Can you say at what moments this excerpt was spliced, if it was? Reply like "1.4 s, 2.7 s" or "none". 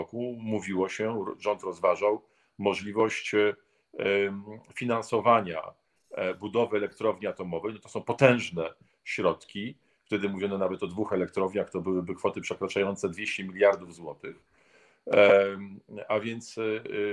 none